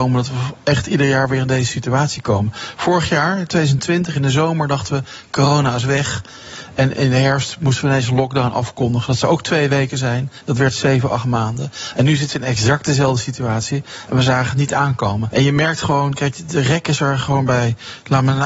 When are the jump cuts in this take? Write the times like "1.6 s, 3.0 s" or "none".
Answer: 15.3 s